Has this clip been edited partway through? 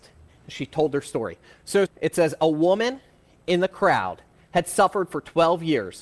yes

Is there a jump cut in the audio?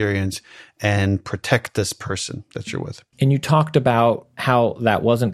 yes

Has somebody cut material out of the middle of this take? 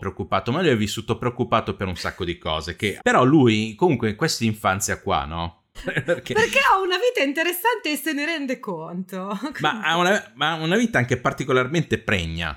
yes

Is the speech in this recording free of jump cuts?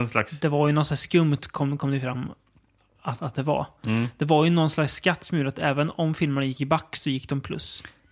yes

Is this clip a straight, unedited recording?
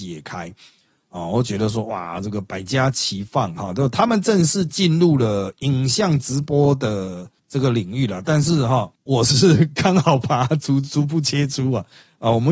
yes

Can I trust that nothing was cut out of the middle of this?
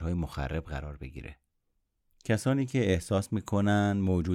yes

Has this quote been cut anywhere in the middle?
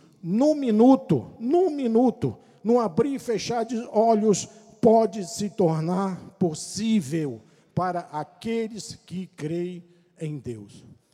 no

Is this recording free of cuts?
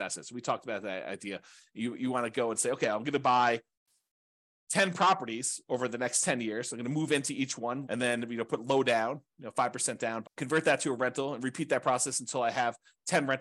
no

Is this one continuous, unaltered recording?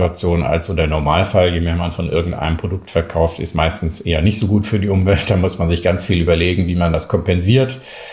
yes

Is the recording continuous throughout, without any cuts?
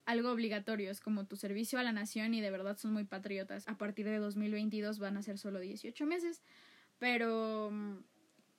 no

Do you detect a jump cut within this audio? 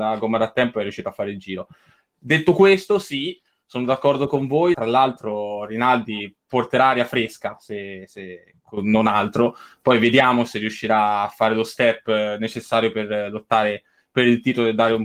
yes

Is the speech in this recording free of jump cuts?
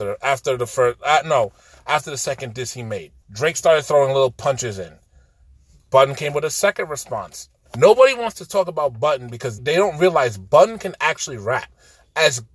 no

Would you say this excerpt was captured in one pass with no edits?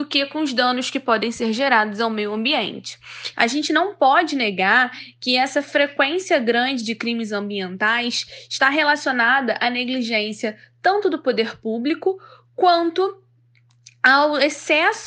no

